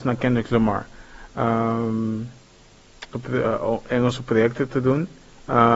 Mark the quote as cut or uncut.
cut